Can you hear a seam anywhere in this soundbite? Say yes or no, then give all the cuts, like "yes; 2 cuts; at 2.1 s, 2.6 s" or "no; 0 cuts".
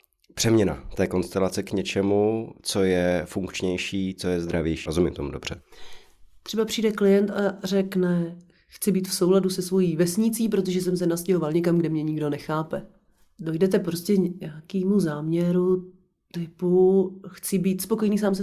yes; 1 cut; at 4.9 s